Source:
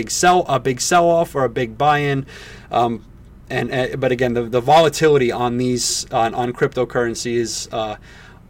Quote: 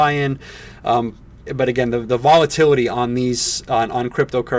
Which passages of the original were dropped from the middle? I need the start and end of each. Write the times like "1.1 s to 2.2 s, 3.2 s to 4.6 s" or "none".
3.3 s to 3.9 s